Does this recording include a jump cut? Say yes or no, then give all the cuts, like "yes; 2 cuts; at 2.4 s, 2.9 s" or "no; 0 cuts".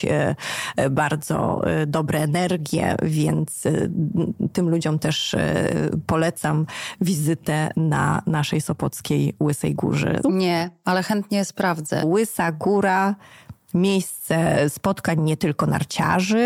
yes; 2 cuts; at 10.2 s, 12.0 s